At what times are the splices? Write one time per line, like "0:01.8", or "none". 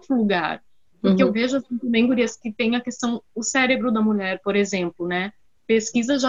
0:00.9